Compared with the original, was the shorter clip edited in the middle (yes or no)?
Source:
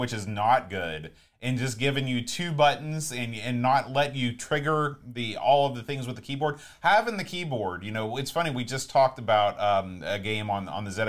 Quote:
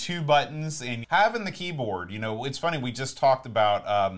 yes